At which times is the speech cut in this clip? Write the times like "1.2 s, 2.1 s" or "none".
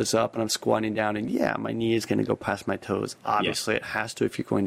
none

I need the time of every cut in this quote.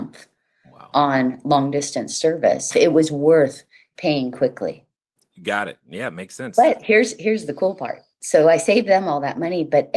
2.7 s

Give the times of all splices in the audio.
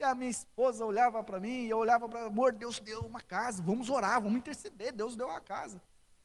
none

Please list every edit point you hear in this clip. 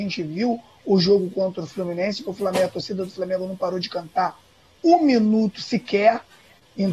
none

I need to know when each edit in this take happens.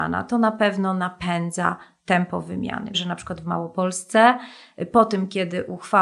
2.9 s

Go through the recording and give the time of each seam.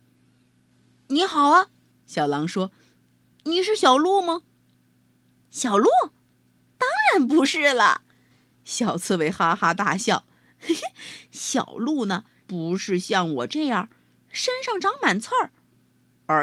12.4 s

